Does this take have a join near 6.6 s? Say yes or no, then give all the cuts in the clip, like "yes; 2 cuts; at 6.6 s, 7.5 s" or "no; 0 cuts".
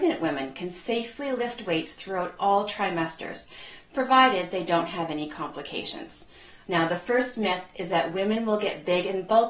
yes; 1 cut; at 6.6 s